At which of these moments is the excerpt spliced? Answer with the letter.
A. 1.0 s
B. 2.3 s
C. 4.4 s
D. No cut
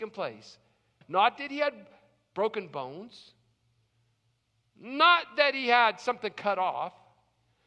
A